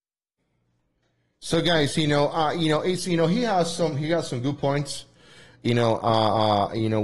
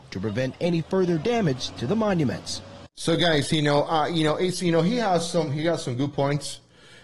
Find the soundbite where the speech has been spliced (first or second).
second